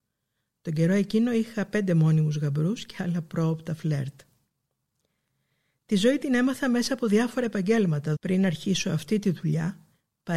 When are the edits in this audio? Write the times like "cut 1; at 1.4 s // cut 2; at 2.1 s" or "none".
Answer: cut 1; at 8.2 s